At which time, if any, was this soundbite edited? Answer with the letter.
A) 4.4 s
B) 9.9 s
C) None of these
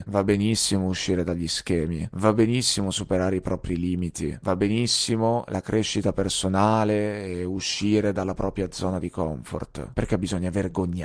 B